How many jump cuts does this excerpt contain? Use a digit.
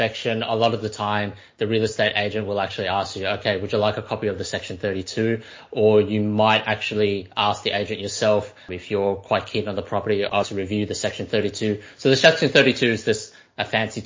1